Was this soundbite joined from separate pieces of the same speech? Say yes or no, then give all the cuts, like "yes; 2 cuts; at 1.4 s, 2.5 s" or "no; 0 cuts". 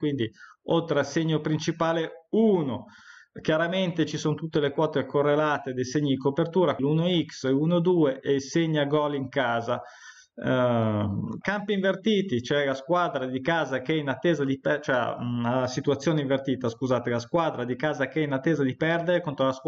yes; 2 cuts; at 6.8 s, 11.4 s